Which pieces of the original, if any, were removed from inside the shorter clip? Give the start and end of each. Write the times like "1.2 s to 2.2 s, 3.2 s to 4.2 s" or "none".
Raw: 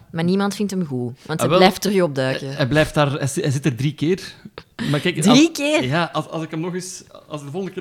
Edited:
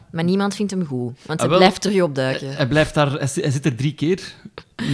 none

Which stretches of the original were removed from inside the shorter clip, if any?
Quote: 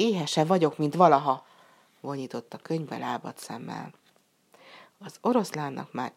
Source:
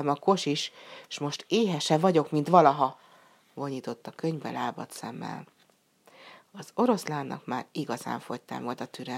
none

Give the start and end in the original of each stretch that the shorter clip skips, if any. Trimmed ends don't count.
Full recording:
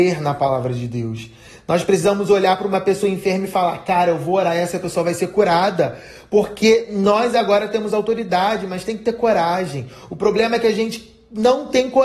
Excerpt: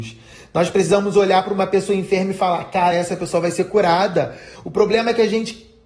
4.1 s to 4.5 s, 6.2 s to 10.0 s

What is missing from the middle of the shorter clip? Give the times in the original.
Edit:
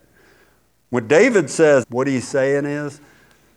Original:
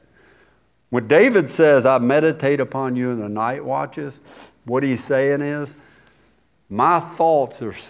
1.8 s to 4.6 s

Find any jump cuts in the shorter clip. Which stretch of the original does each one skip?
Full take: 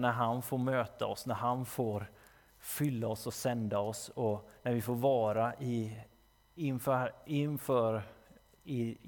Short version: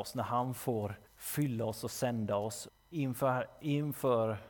2.2 s to 2.5 s, 4.1 s to 6.3 s

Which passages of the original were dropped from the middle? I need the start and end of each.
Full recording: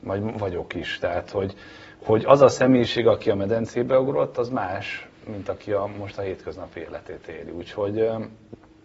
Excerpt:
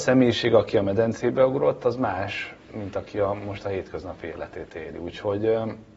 none

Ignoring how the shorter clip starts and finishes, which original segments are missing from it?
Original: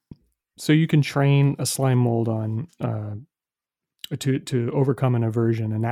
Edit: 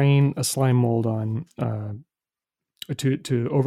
none

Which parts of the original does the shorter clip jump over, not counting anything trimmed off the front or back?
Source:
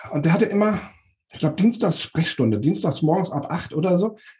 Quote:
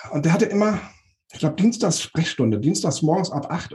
none

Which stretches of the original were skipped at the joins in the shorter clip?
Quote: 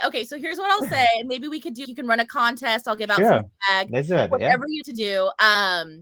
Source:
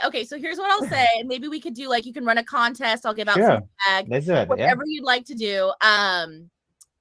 1.8 s to 2.0 s, 5.0 s to 5.2 s

